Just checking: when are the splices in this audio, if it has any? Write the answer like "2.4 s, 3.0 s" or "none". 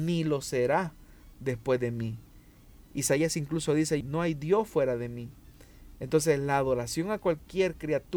4.0 s